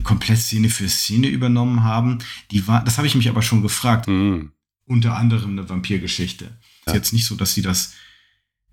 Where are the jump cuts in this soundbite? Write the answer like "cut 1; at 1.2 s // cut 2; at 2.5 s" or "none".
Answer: cut 1; at 4.0 s // cut 2; at 6.9 s